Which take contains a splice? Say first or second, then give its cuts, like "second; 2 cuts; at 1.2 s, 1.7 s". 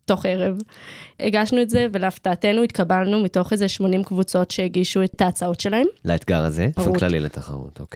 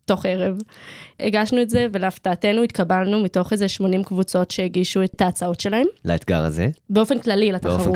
first; 1 cut; at 6.8 s